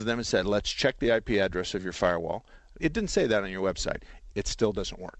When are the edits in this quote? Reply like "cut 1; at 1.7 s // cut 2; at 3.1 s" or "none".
cut 1; at 2.8 s // cut 2; at 4.3 s